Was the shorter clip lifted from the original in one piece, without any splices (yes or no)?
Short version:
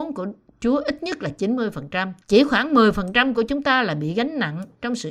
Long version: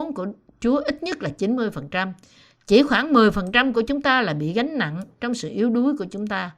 no